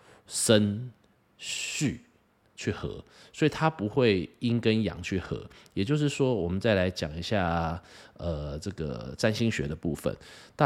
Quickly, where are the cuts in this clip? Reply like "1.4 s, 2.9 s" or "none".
none